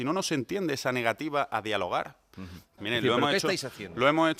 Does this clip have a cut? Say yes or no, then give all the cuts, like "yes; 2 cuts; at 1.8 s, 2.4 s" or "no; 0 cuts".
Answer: yes; 1 cut; at 2.8 s